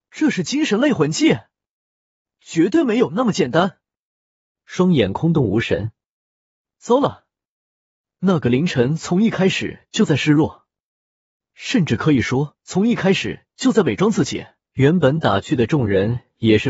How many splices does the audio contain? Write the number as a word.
two